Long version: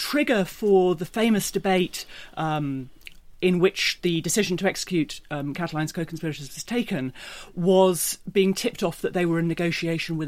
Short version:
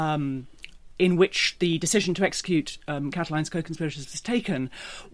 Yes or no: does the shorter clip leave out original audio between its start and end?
no